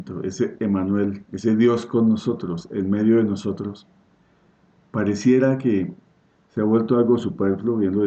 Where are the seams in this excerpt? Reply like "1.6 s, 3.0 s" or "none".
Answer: none